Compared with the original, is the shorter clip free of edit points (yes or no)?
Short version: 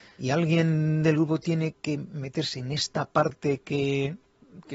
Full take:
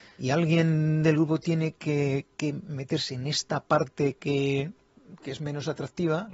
no